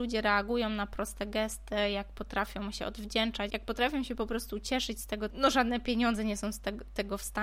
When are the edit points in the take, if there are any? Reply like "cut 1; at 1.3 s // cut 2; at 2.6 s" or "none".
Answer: cut 1; at 3.5 s // cut 2; at 5.3 s

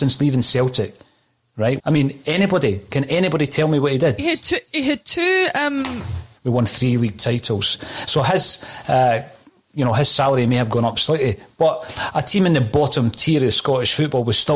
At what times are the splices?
cut 1; at 1.8 s // cut 2; at 4.2 s // cut 3; at 6.4 s

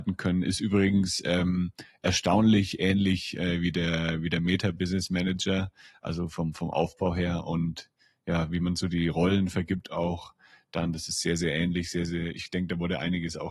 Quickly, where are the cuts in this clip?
none

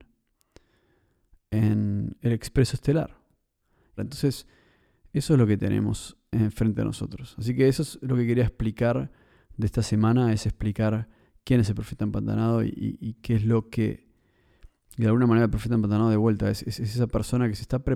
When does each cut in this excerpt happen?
cut 1; at 4.0 s

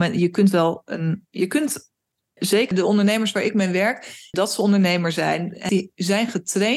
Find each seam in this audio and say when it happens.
cut 1; at 2.7 s // cut 2; at 4.3 s // cut 3; at 5.7 s

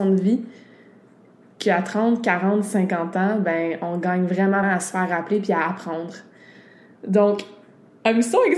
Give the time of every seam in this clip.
cut 1; at 4.6 s

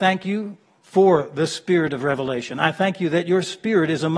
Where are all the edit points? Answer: none

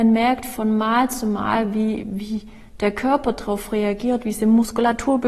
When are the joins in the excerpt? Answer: cut 1; at 2.0 s

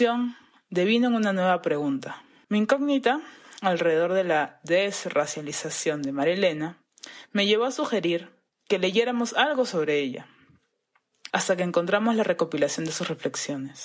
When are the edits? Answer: cut 1; at 2.4 s // cut 2; at 11.3 s

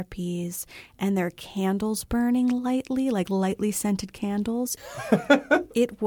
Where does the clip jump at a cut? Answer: cut 1; at 4.8 s

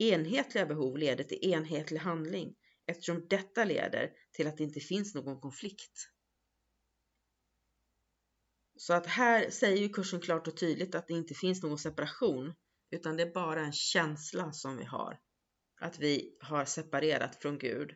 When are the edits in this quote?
none

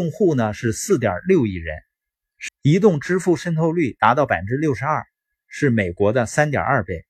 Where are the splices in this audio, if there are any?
cut 1; at 2.5 s

